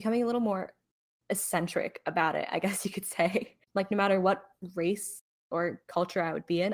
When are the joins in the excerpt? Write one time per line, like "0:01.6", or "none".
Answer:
0:03.6